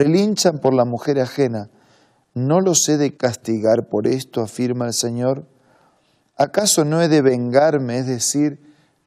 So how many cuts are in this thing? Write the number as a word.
zero